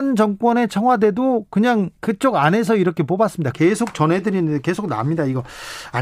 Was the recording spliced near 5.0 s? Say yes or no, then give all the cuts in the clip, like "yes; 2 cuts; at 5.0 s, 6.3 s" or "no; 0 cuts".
no; 2 cuts; at 2.0 s, 3.5 s